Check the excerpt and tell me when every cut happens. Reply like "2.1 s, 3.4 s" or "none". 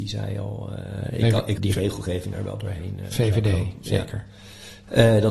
1.6 s